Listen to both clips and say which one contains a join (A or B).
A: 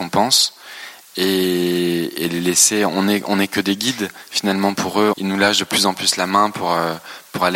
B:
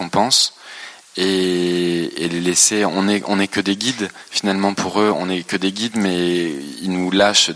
A